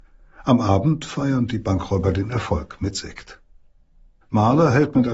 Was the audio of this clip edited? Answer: yes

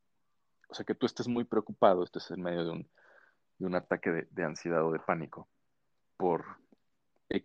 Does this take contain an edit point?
no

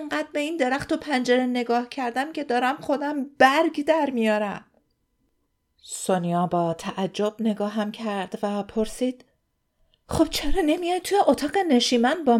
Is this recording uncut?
yes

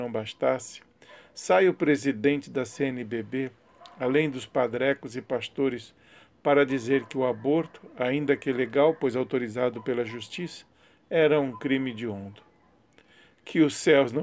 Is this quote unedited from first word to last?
yes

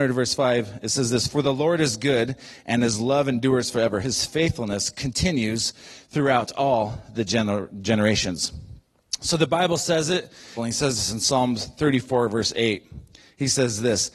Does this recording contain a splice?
yes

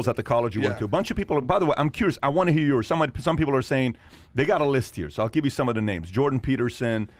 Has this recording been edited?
no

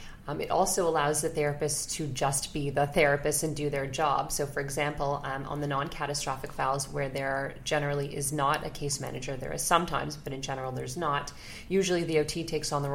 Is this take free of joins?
yes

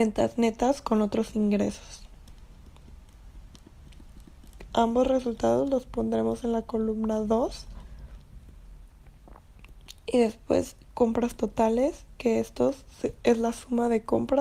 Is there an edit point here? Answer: yes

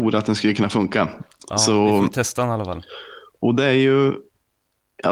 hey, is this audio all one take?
yes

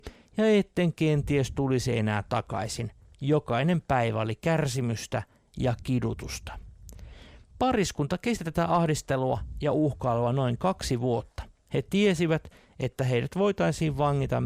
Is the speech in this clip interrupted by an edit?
no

